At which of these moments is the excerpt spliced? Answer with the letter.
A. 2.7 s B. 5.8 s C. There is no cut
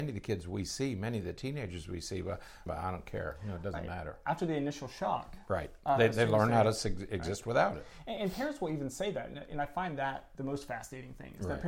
A